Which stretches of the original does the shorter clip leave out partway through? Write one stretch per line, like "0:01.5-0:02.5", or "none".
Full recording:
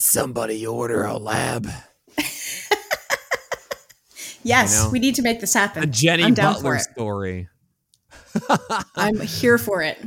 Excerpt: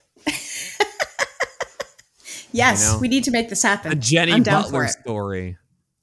none